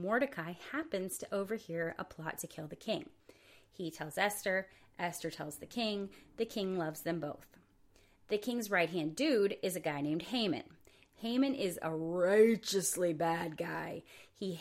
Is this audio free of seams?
yes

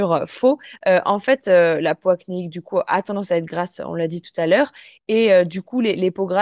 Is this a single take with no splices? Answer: yes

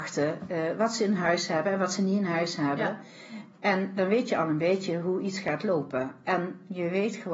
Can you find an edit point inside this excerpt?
no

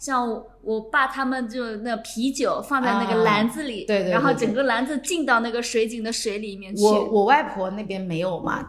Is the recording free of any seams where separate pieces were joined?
yes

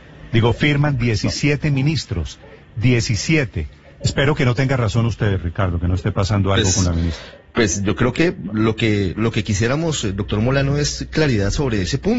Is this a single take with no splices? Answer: no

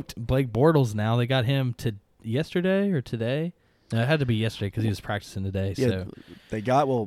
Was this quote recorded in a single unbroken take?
yes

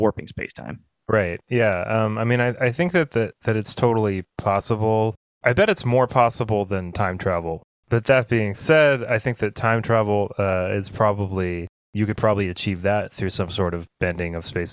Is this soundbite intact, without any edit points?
yes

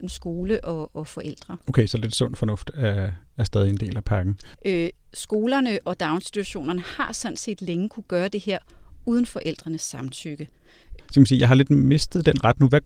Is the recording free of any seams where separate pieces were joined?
no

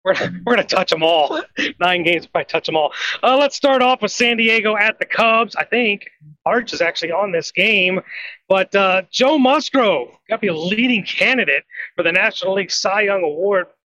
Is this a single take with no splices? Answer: yes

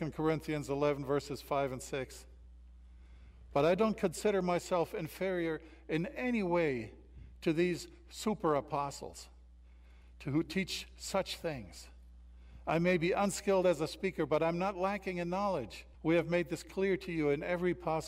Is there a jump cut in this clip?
yes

